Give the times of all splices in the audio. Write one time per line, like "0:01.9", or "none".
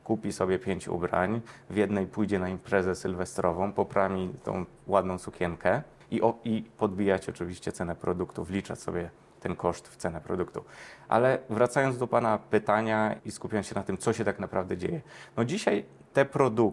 0:06.0
0:13.2